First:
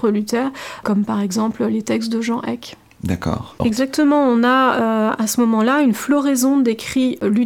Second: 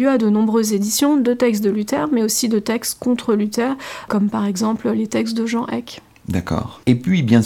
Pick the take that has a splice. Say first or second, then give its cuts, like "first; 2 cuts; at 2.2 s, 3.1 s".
first; 1 cut; at 3.6 s